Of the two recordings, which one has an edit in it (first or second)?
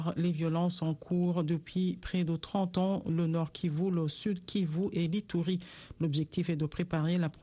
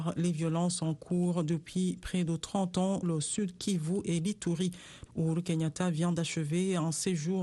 second